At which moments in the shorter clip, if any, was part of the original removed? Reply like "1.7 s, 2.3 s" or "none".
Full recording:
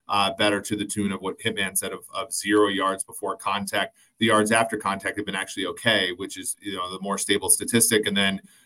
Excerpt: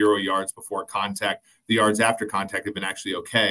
none